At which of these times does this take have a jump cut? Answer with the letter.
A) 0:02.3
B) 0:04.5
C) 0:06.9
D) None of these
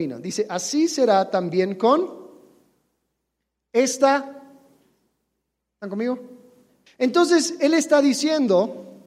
C